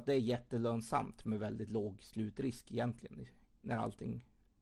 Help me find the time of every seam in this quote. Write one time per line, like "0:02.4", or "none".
0:03.6